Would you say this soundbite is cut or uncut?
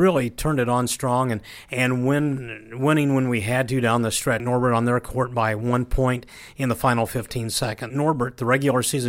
cut